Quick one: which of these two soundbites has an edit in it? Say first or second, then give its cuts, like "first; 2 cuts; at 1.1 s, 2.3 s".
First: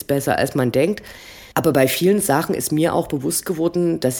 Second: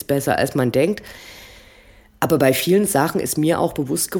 first; 1 cut; at 1.5 s